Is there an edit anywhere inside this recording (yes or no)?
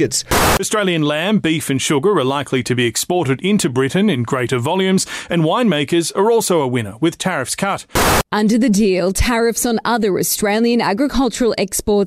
no